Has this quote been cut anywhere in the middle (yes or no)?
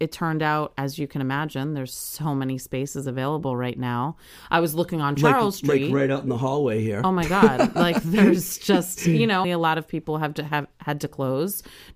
yes